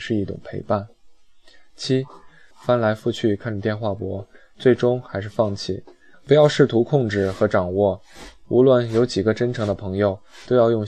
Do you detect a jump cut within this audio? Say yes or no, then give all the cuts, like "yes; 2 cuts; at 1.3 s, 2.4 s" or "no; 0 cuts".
yes; 2 cuts; at 2.5 s, 6.1 s